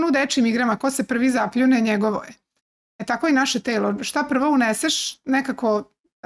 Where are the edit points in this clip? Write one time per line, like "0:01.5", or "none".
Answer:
none